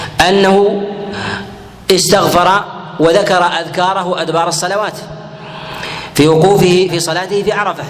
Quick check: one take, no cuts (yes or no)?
no